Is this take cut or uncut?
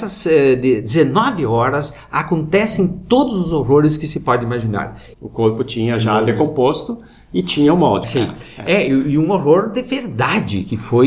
cut